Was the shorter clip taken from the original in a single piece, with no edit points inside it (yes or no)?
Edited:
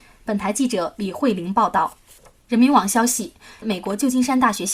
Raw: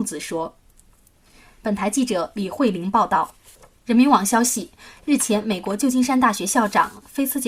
no